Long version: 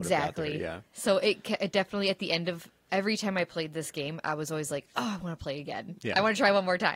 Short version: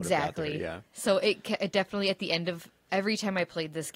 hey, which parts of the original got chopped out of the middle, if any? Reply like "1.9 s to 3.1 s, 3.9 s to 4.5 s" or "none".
none